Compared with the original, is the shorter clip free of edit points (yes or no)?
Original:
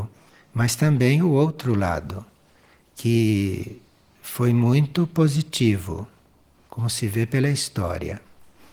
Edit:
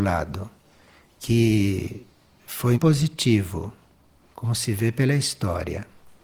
no